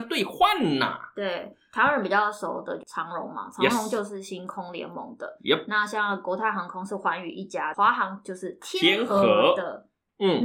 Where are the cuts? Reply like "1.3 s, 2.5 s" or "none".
none